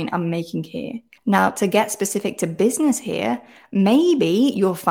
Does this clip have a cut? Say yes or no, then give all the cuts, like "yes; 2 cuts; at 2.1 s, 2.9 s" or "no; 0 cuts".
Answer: yes; 1 cut; at 1.2 s